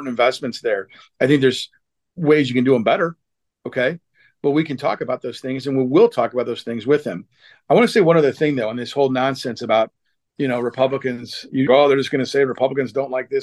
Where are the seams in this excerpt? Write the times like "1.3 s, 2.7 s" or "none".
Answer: 11.7 s